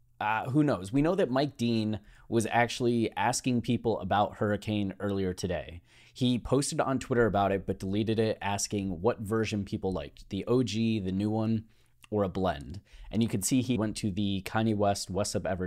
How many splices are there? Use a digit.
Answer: 1